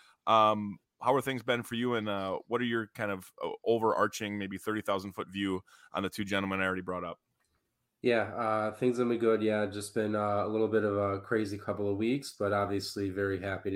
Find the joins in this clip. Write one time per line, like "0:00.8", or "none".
none